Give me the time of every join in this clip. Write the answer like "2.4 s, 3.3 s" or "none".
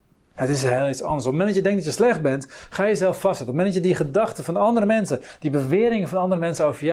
none